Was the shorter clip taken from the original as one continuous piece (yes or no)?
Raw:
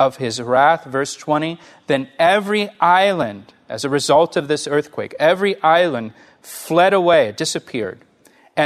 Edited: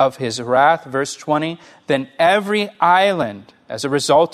yes